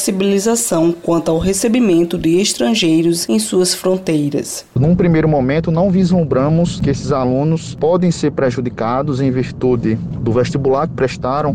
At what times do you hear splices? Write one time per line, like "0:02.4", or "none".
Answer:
none